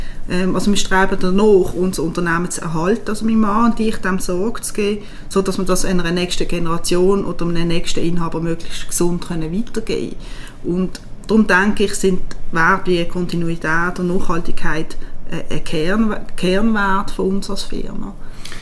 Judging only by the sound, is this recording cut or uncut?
uncut